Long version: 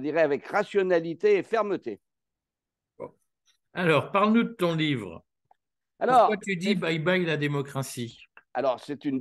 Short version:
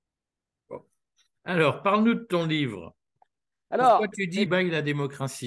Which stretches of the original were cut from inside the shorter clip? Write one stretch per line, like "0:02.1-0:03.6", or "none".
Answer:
0:06.7-0:07.0